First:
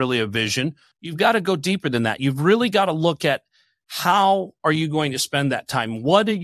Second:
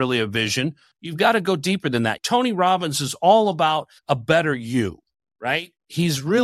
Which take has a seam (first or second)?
second